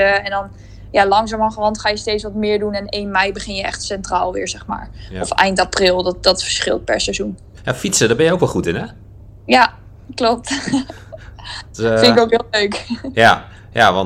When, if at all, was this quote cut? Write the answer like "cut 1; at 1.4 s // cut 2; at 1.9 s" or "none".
none